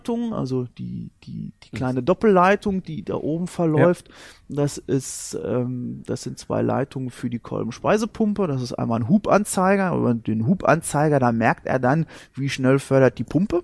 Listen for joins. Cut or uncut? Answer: uncut